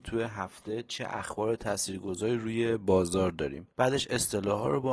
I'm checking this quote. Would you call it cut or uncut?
cut